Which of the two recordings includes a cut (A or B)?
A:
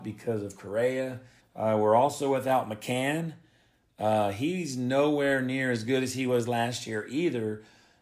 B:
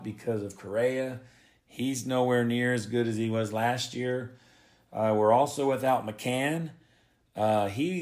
A